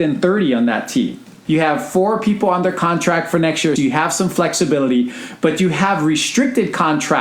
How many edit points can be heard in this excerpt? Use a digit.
2